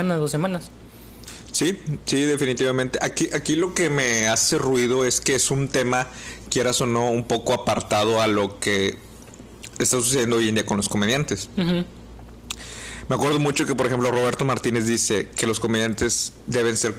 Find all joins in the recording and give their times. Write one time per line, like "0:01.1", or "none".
none